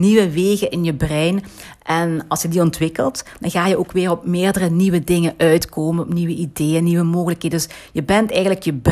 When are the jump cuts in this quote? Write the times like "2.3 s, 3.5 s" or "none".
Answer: none